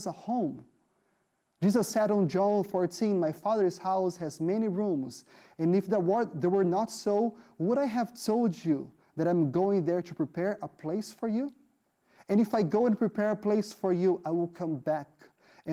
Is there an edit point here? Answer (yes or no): no